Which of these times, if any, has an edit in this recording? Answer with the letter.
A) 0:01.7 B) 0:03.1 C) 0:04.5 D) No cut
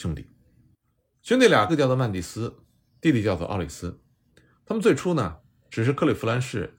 A